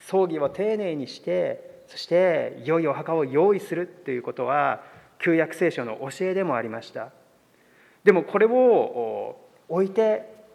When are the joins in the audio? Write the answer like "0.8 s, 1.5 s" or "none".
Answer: none